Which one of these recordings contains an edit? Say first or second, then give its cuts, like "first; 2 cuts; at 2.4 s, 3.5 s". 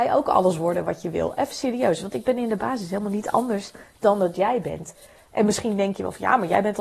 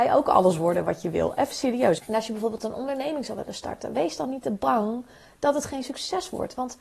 second; 1 cut; at 2.0 s